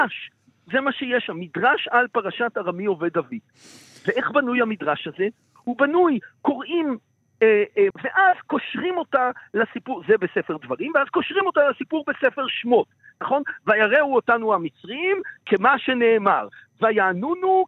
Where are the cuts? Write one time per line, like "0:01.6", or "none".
0:07.9